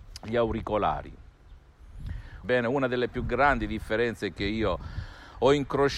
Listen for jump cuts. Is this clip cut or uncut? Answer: cut